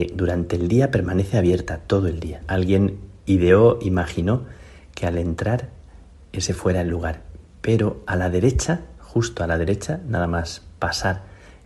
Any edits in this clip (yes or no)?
yes